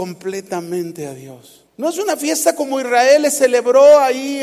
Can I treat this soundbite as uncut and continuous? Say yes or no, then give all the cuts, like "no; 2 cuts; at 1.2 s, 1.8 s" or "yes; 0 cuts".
no; 1 cut; at 1.7 s